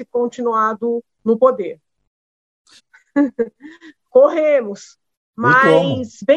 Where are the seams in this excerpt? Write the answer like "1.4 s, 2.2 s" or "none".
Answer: 2.8 s